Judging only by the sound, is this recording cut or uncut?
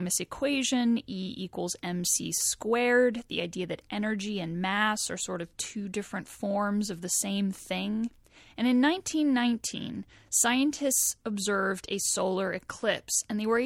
uncut